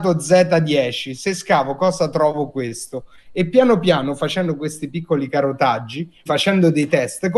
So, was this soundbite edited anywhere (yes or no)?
yes